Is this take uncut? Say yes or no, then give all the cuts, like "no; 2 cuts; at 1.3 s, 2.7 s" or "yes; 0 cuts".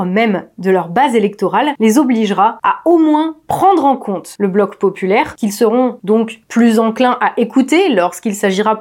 yes; 0 cuts